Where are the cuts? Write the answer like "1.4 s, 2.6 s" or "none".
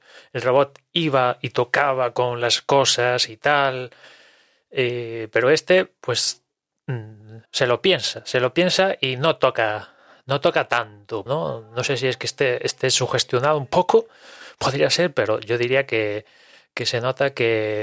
7.5 s, 11.3 s